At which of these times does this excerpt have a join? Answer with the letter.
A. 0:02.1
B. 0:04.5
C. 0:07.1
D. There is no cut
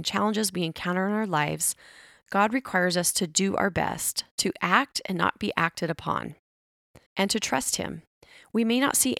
C